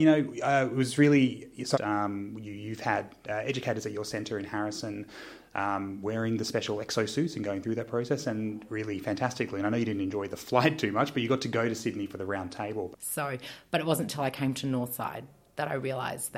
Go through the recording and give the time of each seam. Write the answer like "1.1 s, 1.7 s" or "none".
1.7 s, 12.9 s